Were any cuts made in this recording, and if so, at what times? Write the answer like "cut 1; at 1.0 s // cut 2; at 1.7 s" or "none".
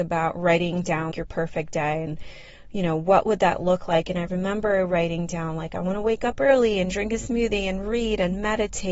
cut 1; at 1.1 s